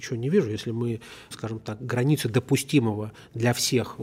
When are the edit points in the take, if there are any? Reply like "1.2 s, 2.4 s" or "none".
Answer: 1.3 s